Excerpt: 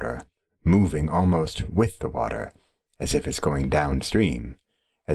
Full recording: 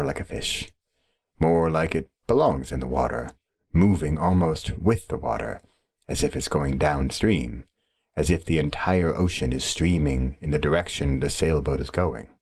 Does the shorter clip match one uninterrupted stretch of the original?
yes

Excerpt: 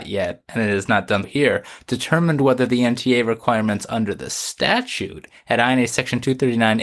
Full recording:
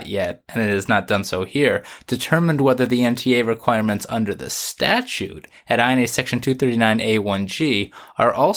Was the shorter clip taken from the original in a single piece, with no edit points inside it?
no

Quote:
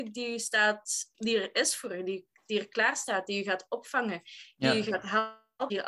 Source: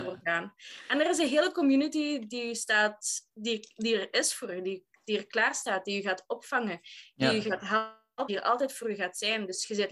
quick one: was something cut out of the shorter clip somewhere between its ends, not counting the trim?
yes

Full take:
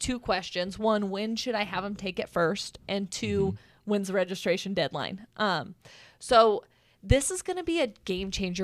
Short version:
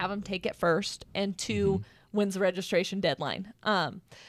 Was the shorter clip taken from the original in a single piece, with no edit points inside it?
yes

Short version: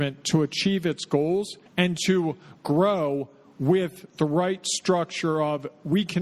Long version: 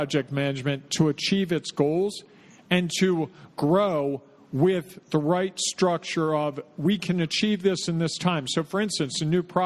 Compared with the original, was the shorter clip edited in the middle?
yes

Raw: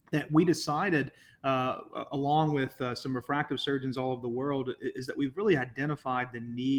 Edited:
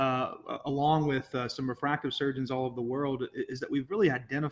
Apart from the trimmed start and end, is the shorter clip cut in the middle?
no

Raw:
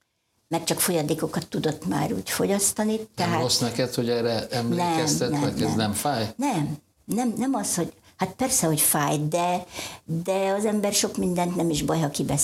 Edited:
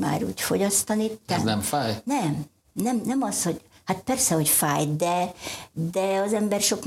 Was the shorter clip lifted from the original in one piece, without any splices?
no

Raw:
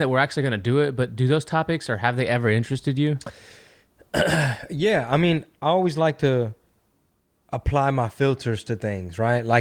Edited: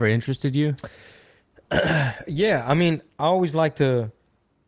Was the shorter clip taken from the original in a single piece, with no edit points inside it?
yes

